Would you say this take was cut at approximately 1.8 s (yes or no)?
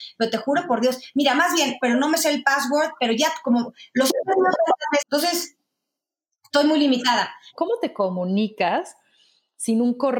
yes